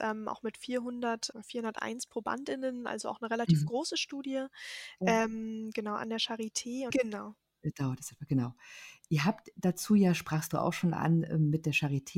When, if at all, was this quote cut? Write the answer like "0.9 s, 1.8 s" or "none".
1.3 s, 6.9 s